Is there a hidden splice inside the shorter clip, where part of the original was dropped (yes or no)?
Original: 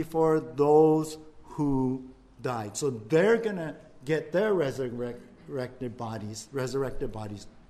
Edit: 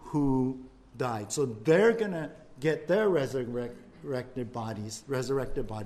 no